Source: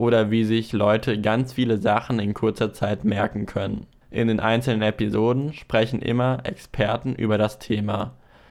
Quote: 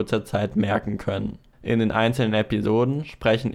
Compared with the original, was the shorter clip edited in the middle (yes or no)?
no